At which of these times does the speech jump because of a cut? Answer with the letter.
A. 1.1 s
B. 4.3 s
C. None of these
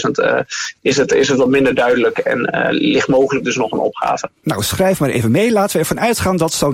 C